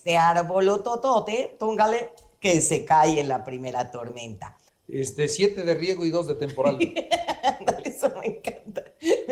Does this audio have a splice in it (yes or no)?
yes